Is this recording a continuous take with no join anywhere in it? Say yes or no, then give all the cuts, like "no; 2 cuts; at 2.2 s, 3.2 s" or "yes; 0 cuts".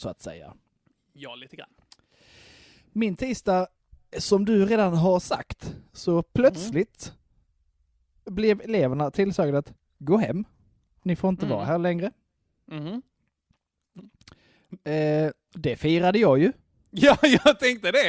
yes; 0 cuts